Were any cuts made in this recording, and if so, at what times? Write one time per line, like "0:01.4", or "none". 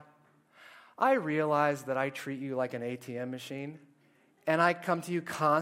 none